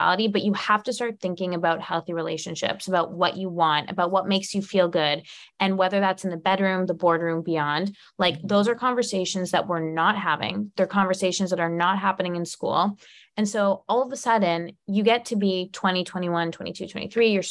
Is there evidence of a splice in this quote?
no; 0 cuts

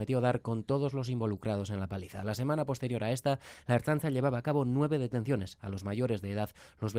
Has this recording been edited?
no; 0 cuts

